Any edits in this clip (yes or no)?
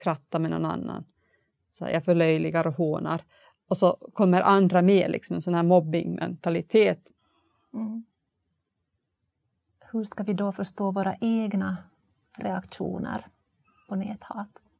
no